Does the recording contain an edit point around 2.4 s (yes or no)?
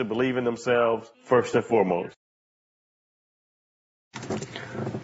no